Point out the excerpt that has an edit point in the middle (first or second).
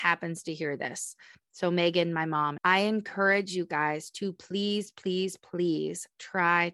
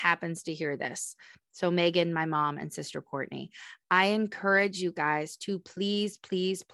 first